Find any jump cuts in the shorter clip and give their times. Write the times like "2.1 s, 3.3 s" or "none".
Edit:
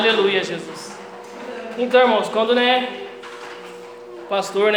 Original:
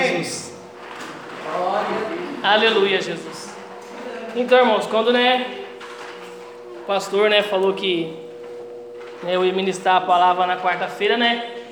none